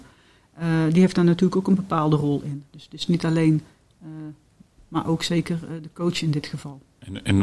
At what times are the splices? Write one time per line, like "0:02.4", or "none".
0:04.8